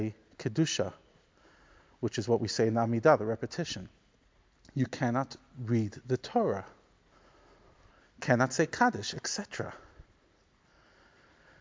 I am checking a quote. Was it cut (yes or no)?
no